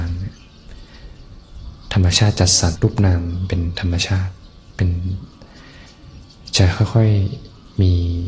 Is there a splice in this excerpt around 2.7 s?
yes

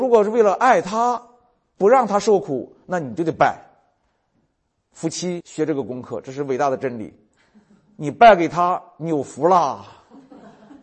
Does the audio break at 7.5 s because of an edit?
no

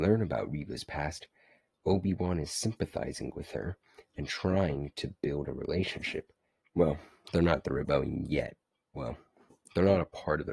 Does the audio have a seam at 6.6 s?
yes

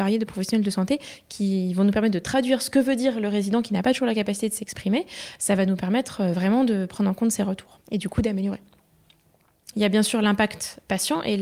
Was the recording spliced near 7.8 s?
yes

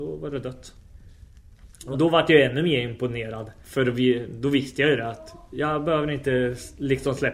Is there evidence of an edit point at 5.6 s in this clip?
no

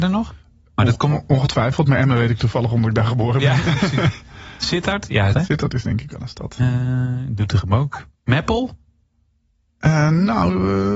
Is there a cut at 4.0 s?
no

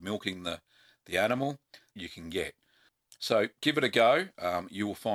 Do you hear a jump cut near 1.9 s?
yes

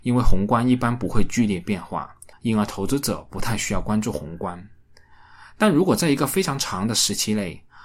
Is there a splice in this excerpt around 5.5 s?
no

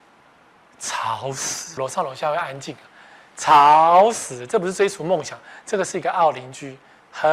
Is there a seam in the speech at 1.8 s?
yes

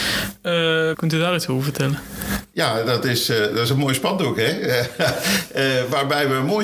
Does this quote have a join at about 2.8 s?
no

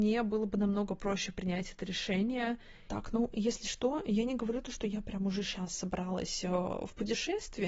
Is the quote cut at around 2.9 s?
yes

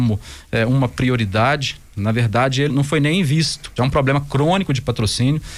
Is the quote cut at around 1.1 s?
no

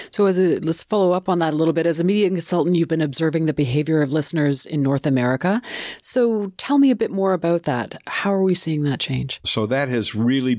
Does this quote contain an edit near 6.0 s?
no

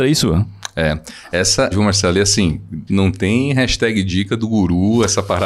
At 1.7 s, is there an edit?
yes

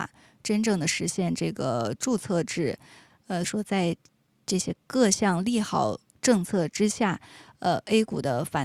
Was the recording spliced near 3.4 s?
yes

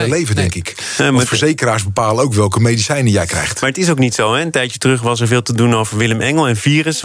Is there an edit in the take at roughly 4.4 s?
no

